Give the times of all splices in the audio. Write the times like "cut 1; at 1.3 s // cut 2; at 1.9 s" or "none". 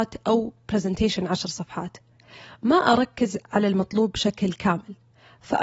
none